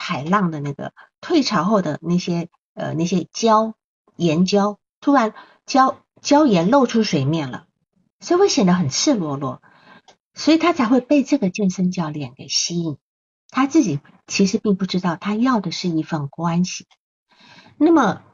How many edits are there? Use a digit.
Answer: 0